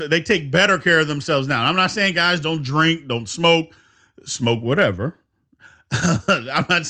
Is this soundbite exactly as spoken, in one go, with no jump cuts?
yes; 0 cuts

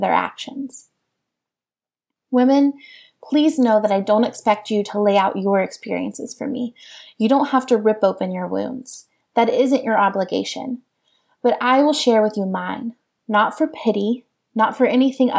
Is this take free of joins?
yes; 0 cuts

